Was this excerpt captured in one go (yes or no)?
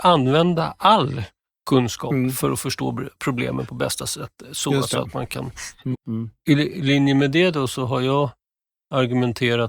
no